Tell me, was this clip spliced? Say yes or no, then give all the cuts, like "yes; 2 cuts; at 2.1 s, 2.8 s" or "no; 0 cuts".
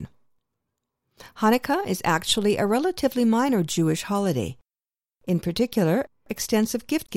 yes; 1 cut; at 5.1 s